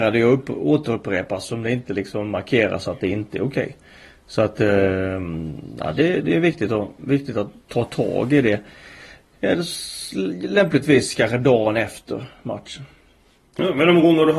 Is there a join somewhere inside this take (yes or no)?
no